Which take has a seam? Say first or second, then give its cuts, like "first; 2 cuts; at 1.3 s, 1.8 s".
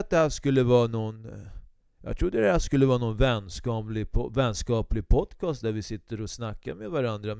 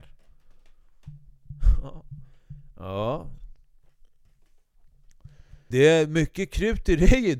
second; 1 cut; at 5.7 s